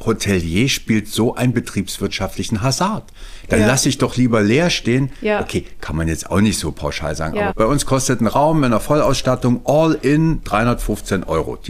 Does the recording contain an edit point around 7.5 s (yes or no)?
yes